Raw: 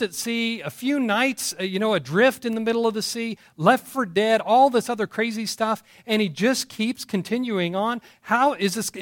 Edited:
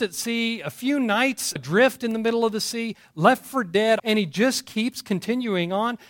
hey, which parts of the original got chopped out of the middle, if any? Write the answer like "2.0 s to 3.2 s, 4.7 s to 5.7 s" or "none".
1.6 s to 2.0 s, 4.4 s to 6.0 s

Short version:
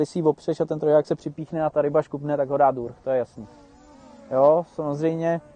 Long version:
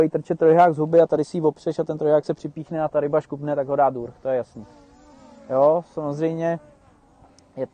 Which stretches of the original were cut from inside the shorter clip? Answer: none

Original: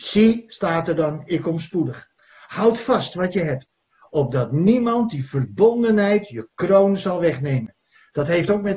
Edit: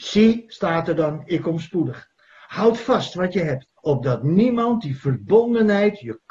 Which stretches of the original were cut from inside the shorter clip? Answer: 3.8 s to 4.1 s

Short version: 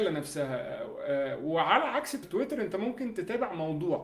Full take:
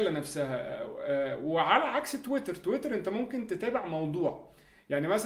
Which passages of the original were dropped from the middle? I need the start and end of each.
2.2 s to 2.6 s

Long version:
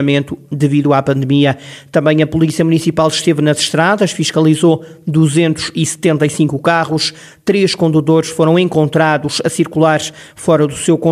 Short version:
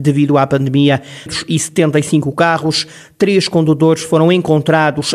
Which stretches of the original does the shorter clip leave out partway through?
1.8 s to 5.5 s

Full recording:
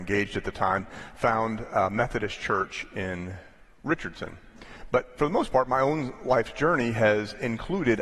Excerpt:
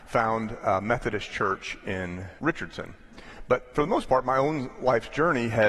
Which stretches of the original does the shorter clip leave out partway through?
3.5 s to 3.8 s

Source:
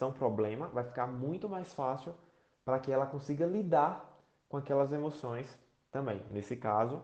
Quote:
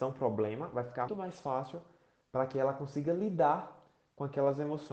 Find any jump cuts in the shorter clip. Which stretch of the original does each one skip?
1.1 s to 1.4 s

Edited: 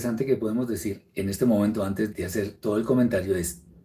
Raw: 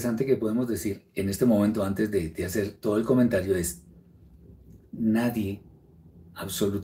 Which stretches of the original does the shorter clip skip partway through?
2.1 s to 2.3 s

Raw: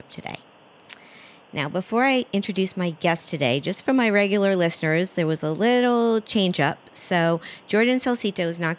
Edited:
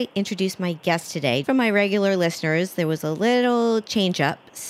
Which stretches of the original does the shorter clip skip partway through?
3.6 s to 3.8 s

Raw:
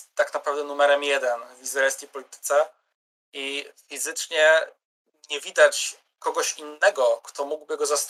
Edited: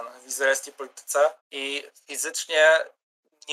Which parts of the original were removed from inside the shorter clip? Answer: 2.7 s to 3.2 s

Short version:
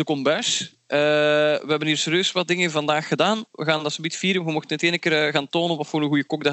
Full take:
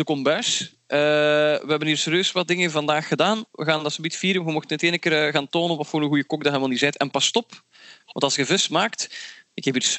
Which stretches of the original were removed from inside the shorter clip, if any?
none

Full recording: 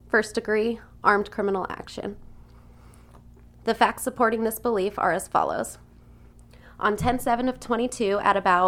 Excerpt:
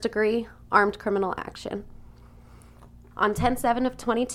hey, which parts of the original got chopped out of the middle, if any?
3.4 s to 6.7 s

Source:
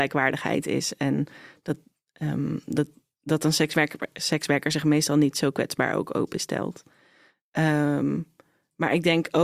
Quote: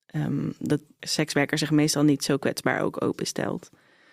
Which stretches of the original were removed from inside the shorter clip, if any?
3.1 s to 4.1 s

